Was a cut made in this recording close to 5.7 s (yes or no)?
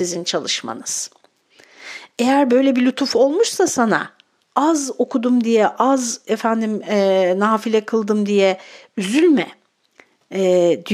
no